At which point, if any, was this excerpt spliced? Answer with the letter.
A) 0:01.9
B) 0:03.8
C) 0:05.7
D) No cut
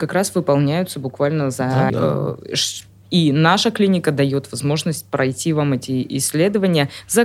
A